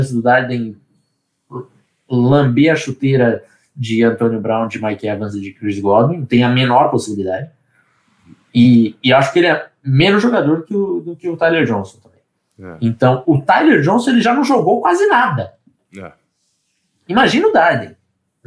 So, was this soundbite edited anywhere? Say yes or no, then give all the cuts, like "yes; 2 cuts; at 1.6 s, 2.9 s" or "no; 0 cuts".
no; 0 cuts